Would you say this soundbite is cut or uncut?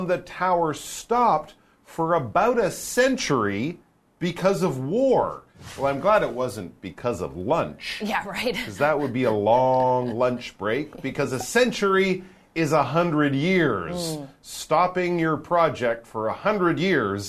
uncut